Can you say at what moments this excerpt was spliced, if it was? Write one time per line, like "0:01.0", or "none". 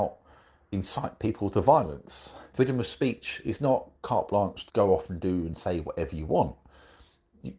0:02.5
0:04.7